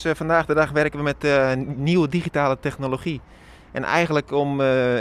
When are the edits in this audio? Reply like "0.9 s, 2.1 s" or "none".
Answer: 3.6 s